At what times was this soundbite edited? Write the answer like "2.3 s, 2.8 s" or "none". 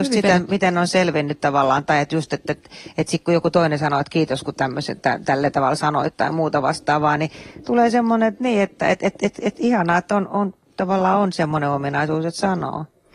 none